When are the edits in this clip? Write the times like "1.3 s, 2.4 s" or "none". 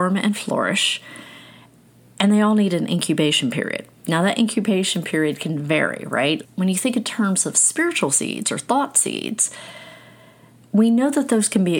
6.4 s